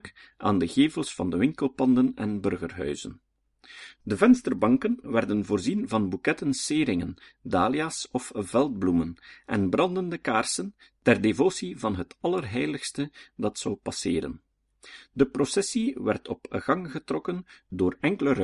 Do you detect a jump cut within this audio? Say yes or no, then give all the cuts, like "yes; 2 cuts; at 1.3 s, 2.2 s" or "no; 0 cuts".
no; 0 cuts